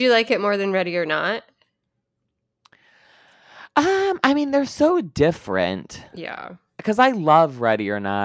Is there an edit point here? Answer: no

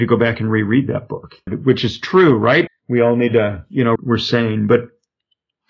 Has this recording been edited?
yes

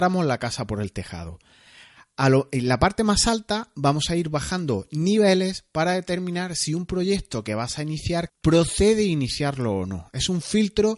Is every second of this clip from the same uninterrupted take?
no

